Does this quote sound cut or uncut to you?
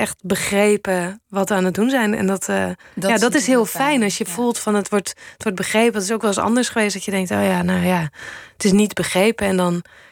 uncut